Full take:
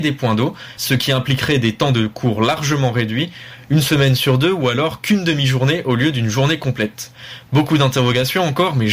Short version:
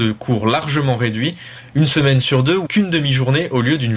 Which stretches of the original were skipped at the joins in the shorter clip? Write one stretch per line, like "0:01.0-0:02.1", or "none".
0:04.6-0:05.0